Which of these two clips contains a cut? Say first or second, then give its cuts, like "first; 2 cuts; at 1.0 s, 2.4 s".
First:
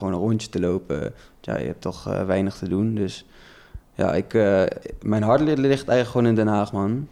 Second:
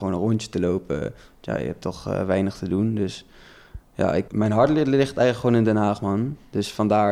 second; 1 cut; at 4.3 s